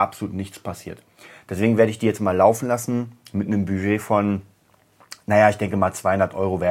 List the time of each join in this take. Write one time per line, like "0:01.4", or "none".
none